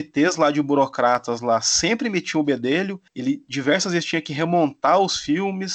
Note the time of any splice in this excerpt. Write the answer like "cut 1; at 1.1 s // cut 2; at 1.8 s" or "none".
cut 1; at 3.1 s

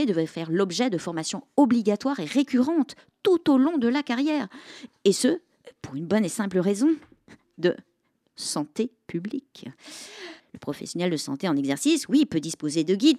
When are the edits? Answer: cut 1; at 10.4 s

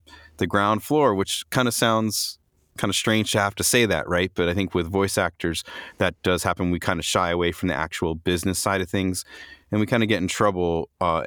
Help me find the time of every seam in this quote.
none

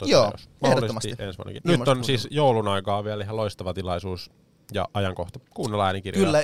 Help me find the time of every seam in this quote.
cut 1; at 1.6 s

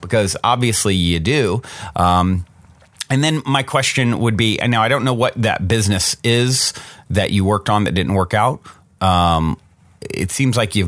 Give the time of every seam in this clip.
cut 1; at 9.0 s

